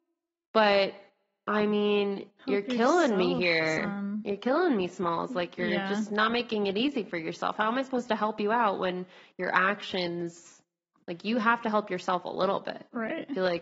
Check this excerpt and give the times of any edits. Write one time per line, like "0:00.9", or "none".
none